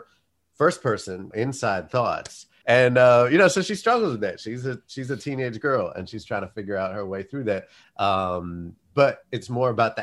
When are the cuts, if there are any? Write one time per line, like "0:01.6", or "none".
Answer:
0:01.3
0:02.6
0:07.8